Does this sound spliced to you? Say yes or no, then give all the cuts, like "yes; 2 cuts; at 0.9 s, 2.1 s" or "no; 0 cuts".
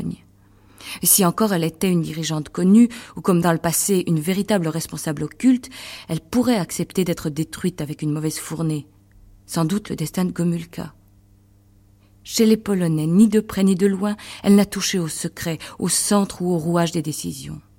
no; 0 cuts